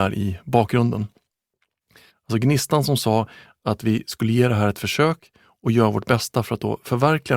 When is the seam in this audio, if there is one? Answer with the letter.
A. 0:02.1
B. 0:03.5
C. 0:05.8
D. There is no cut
A